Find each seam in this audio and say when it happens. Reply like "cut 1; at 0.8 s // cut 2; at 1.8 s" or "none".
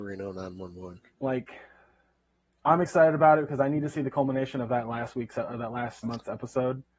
cut 1; at 1.2 s // cut 2; at 6.0 s

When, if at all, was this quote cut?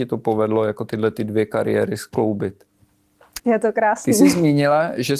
cut 1; at 3.4 s

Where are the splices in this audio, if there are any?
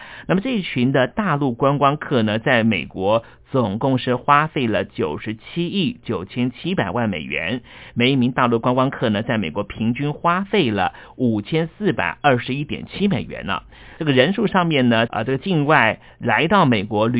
cut 1; at 14.0 s // cut 2; at 15.1 s

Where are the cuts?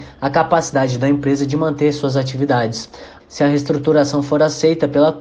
cut 1; at 3.2 s

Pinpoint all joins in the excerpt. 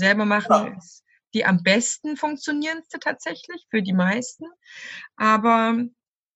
none

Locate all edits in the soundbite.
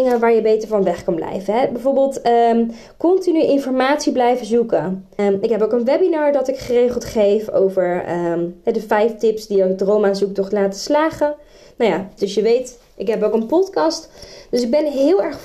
cut 1; at 5.2 s // cut 2; at 12.2 s

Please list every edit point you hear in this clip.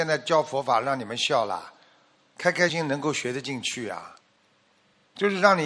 cut 1; at 2.7 s

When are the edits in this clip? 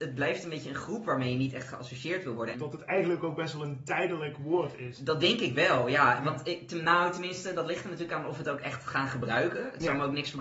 cut 1; at 2.5 s

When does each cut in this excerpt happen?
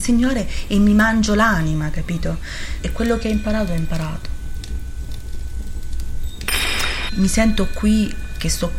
cut 1; at 2.8 s // cut 2; at 7.1 s

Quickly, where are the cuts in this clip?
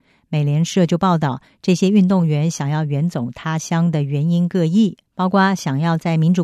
cut 1; at 5.1 s

